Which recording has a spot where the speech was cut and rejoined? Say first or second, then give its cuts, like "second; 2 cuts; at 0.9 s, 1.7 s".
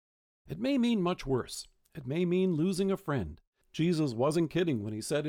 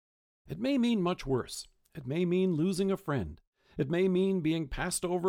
first; 1 cut; at 3.6 s